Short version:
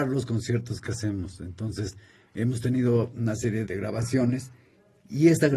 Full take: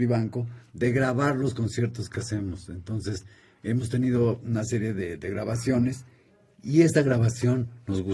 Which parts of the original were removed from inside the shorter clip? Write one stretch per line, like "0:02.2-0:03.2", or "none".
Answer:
0:04.9-0:05.2